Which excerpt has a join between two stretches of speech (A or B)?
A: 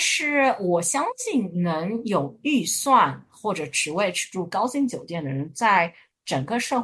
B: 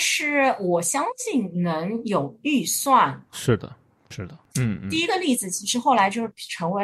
B